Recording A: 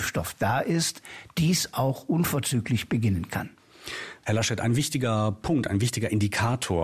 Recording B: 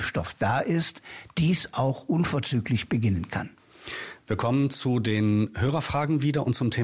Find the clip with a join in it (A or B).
A